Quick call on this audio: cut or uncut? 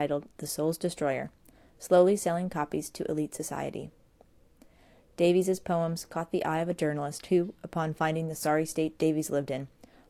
uncut